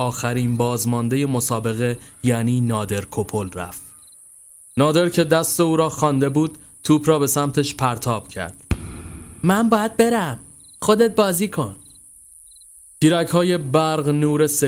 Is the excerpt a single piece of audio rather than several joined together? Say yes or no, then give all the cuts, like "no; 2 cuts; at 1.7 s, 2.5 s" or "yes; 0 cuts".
yes; 0 cuts